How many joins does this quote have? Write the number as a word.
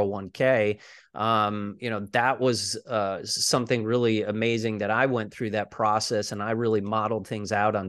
zero